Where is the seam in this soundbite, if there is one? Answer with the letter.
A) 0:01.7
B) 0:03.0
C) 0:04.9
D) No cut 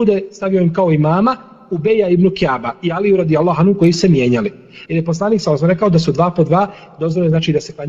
C